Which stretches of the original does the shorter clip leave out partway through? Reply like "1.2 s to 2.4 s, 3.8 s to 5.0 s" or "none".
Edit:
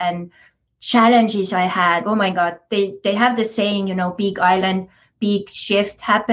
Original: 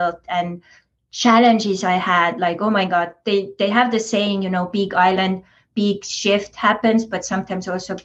2.3 s to 2.6 s